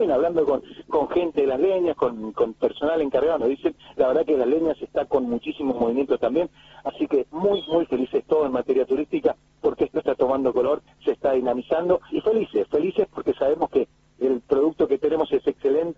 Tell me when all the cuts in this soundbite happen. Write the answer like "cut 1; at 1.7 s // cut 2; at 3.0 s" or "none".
cut 1; at 12.1 s